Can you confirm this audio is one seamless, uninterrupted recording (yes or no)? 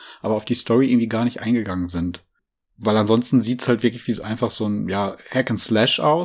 yes